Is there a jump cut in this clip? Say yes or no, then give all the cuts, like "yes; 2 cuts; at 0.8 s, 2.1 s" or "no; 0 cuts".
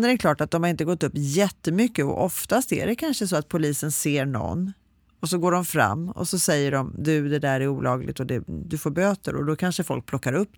no; 0 cuts